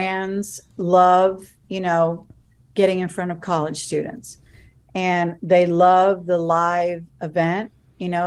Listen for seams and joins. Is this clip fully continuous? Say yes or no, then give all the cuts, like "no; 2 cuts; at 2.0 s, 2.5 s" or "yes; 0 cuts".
yes; 0 cuts